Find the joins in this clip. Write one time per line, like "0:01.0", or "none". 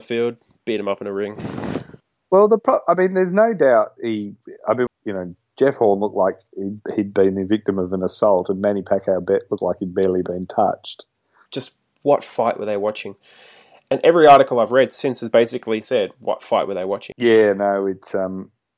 0:04.9
0:11.5
0:17.1